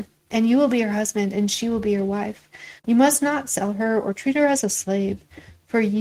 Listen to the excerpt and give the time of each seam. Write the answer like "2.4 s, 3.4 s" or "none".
2.8 s